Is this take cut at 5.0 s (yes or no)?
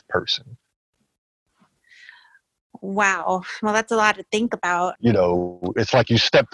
yes